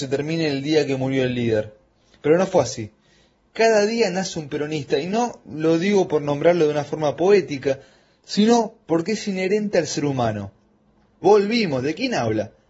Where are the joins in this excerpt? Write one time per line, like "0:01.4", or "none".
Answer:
0:11.2